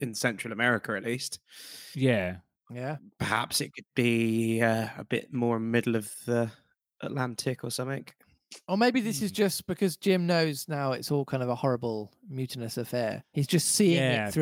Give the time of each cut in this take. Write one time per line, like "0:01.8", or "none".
none